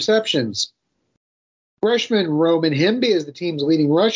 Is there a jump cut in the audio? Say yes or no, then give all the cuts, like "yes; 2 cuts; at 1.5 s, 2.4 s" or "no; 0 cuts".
no; 0 cuts